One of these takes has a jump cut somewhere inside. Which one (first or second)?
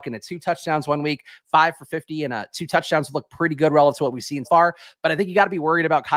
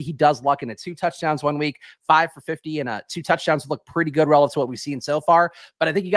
first